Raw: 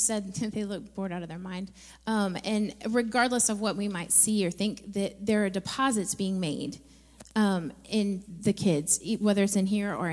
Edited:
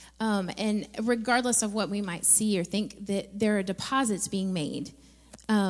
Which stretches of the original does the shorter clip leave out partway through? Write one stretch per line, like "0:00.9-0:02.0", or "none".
none